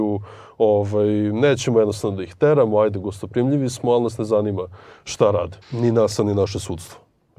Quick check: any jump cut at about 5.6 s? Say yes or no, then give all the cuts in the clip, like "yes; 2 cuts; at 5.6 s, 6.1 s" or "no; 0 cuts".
yes; 1 cut; at 5.6 s